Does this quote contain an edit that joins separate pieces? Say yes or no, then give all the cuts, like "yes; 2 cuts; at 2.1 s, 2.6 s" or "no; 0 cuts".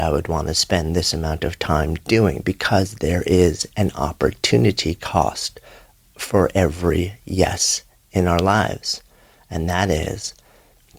no; 0 cuts